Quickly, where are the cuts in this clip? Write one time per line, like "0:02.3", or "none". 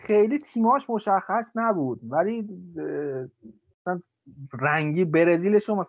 none